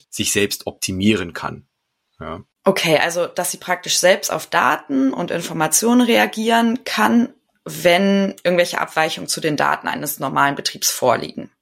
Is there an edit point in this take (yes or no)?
no